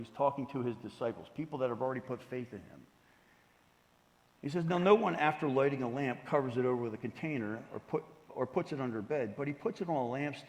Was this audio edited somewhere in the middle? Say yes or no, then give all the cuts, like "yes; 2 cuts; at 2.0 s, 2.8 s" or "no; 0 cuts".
no; 0 cuts